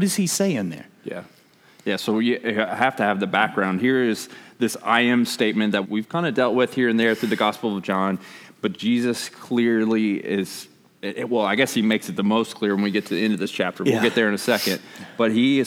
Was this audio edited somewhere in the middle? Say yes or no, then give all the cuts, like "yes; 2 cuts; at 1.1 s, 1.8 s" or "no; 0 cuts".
yes; 1 cut; at 5.8 s